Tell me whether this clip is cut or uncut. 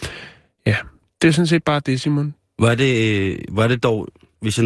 uncut